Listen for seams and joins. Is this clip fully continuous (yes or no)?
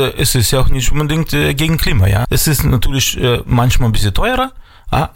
no